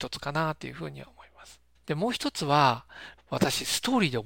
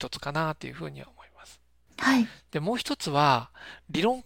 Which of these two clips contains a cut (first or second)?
first